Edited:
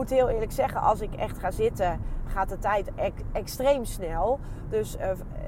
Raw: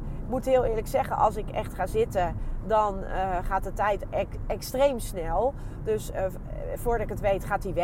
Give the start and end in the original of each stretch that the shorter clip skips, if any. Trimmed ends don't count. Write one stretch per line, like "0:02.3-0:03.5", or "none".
0:02.6-0:03.4